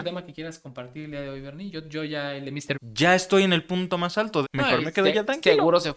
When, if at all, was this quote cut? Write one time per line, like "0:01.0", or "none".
0:02.7
0:04.4

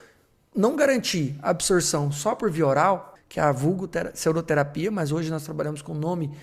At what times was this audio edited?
0:03.2

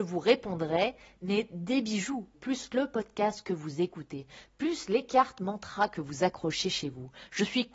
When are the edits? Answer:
0:02.3

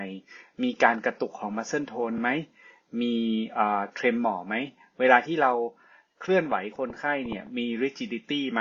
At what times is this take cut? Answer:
none

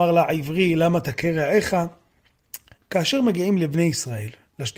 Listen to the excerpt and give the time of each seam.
0:02.8

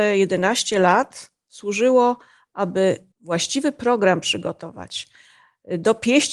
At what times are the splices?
0:03.1

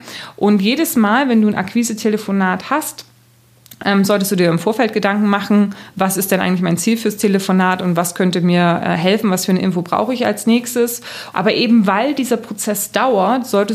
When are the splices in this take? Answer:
0:11.3

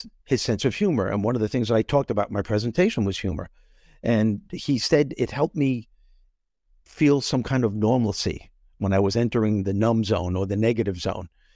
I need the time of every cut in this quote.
none

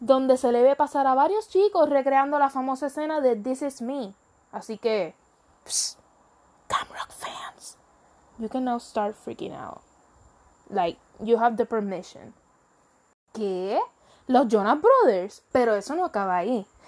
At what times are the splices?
0:13.3
0:15.5

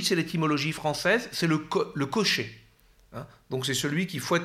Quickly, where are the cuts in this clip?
none

